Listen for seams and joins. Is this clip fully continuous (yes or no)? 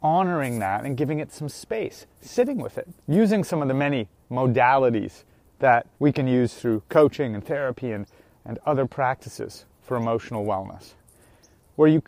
no